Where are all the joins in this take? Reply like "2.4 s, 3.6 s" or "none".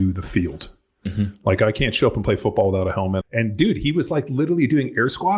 3.2 s